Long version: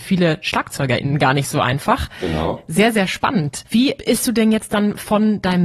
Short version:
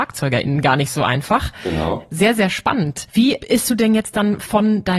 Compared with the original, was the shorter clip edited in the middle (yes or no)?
no